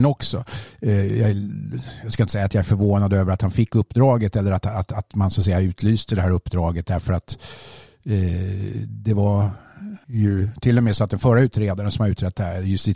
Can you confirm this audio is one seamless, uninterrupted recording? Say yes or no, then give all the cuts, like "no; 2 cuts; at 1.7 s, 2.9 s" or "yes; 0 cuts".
no; 1 cut; at 10.0 s